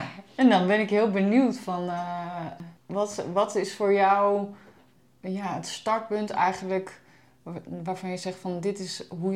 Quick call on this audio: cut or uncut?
uncut